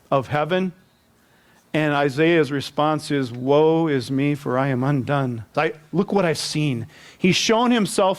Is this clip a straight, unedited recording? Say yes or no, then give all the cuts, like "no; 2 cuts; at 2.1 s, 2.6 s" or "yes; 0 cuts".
no; 1 cut; at 5.5 s